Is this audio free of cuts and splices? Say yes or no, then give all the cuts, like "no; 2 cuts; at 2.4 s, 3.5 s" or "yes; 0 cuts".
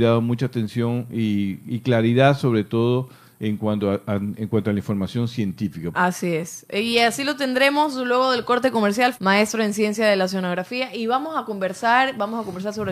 no; 2 cuts; at 5.9 s, 9.1 s